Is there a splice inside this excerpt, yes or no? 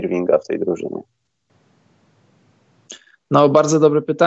no